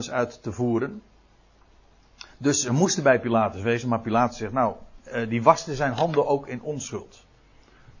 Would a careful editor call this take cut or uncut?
uncut